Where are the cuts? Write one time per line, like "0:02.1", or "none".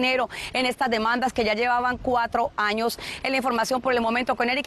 none